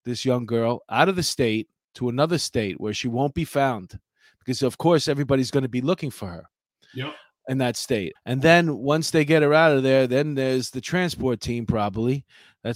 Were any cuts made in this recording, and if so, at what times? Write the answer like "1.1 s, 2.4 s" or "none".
8.1 s